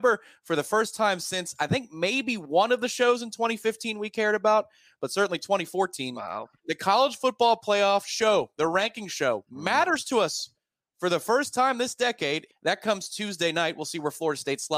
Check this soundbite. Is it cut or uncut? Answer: cut